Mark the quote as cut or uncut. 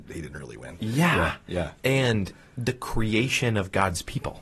uncut